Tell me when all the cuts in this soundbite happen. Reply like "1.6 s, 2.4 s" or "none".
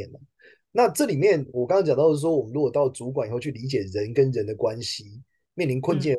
none